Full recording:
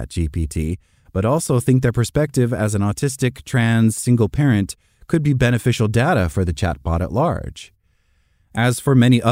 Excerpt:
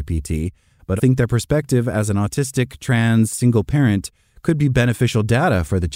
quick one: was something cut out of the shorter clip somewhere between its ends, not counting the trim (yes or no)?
yes